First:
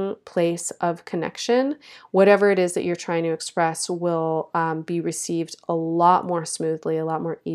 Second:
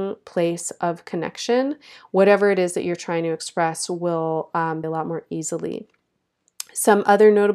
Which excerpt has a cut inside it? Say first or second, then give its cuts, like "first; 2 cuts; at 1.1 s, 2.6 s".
second; 1 cut; at 4.8 s